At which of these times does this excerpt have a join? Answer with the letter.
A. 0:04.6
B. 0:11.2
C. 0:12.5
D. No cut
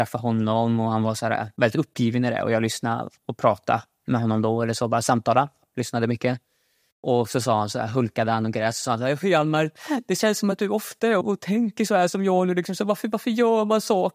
B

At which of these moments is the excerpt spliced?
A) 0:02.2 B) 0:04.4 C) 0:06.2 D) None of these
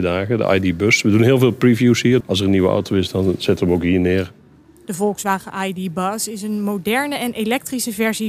A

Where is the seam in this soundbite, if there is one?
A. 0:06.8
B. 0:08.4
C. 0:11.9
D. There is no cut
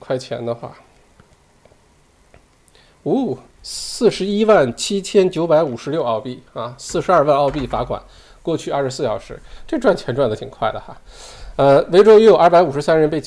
D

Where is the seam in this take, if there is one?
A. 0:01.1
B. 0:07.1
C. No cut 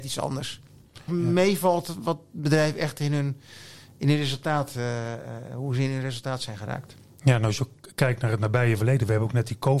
A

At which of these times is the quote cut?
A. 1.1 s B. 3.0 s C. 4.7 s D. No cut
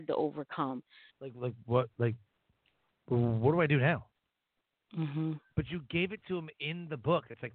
A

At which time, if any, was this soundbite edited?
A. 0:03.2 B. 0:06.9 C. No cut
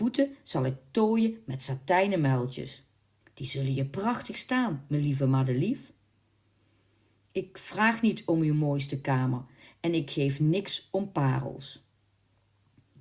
A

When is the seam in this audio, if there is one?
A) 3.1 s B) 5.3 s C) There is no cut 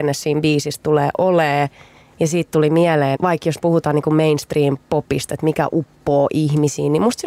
A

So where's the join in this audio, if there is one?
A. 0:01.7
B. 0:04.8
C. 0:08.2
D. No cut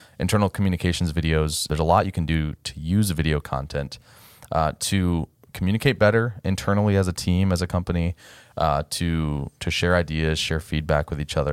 A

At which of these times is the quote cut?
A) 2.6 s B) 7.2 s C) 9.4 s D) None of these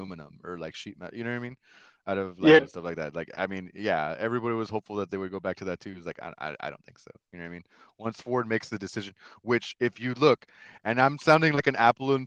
A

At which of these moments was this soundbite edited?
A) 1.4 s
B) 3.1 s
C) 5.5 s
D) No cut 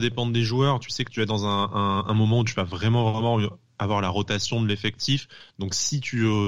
D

